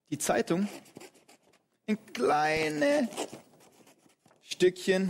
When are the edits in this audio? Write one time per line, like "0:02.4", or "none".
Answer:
none